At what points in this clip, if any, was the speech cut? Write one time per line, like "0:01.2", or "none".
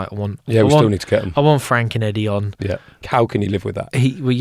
0:03.0